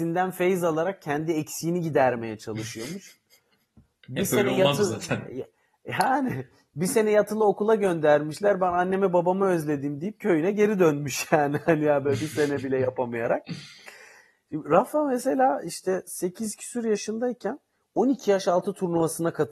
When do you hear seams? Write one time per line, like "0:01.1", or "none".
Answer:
none